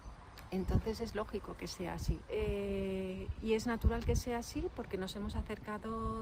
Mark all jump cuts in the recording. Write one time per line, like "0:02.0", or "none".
0:02.3